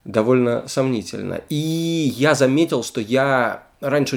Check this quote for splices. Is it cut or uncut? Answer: uncut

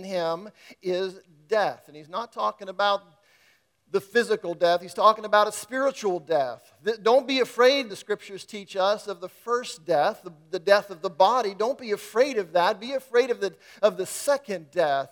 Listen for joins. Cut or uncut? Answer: uncut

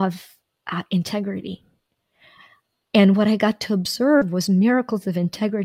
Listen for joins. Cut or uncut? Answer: uncut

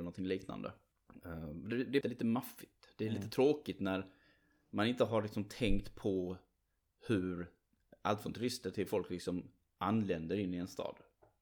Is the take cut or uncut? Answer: cut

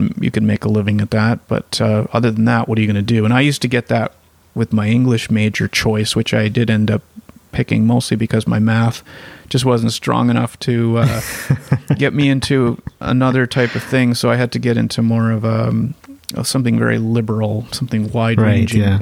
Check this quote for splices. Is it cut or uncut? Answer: uncut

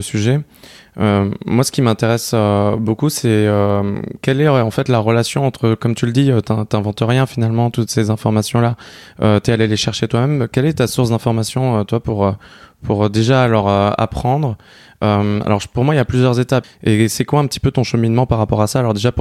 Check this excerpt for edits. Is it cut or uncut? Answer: cut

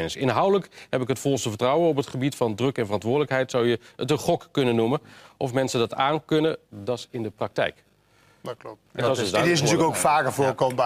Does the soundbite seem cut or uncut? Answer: cut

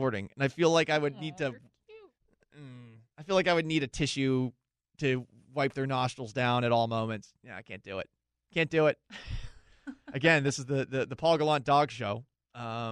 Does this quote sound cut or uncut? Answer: uncut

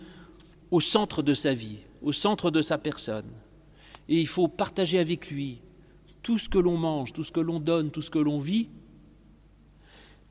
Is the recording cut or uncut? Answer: cut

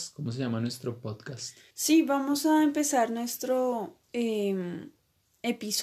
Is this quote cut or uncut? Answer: cut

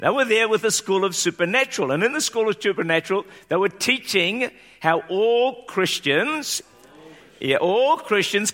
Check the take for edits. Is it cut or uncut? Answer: cut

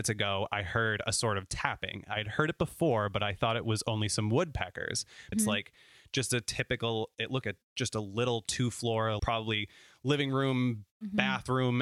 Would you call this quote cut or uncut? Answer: cut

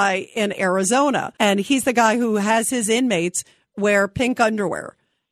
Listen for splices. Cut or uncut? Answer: cut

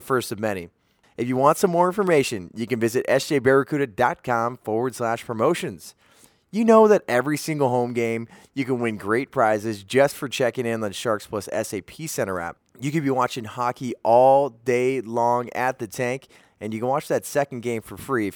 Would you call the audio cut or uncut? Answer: cut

